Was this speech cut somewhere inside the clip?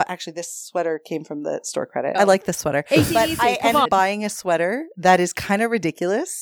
yes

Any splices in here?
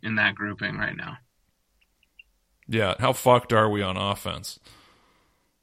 yes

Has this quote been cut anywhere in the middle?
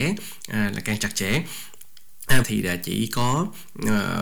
yes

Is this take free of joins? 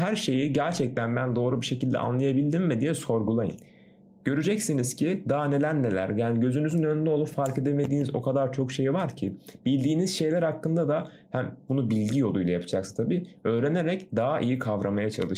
yes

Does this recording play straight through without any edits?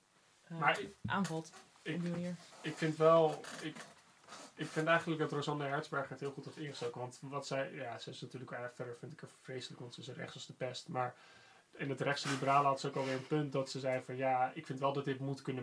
yes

